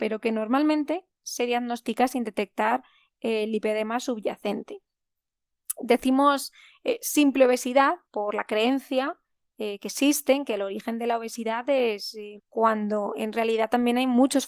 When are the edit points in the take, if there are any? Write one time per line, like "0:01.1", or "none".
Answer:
0:08.0
0:12.4